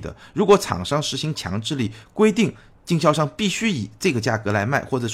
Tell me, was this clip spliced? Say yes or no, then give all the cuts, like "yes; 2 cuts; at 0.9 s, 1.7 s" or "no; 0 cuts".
no; 0 cuts